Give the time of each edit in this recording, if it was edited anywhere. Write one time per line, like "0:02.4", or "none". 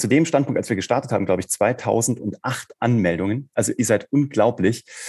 0:03.5